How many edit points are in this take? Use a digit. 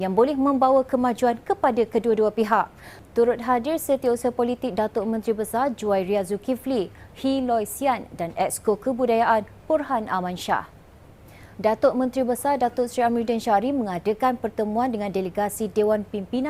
2